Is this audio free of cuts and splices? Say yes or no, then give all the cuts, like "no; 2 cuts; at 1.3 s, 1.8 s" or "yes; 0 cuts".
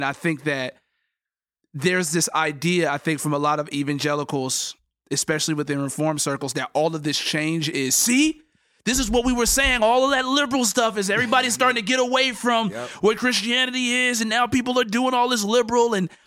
yes; 0 cuts